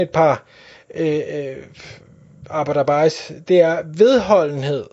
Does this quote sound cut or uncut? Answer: uncut